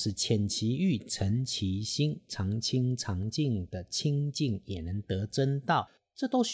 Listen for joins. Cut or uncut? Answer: uncut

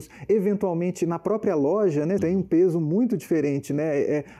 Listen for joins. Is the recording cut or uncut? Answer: cut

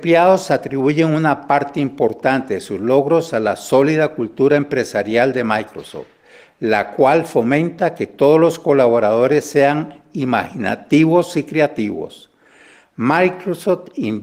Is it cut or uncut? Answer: uncut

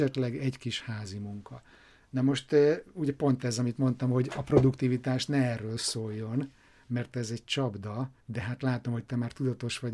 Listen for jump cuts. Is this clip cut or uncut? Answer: cut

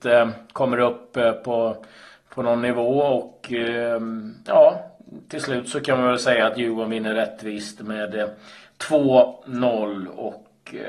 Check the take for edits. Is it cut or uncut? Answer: uncut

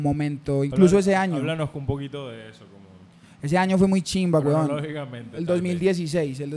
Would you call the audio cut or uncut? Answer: uncut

